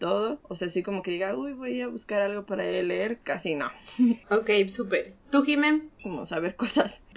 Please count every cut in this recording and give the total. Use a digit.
2